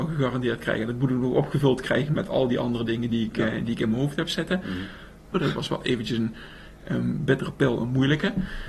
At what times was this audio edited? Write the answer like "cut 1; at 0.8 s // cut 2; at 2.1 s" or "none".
cut 1; at 5.3 s